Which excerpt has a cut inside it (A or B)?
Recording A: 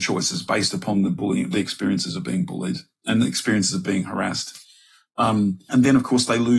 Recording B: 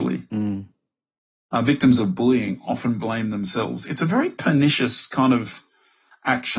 A